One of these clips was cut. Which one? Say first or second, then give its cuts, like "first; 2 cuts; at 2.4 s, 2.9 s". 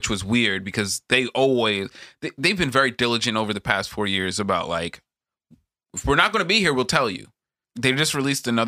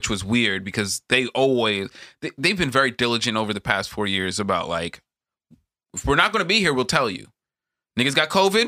first; 1 cut; at 7.6 s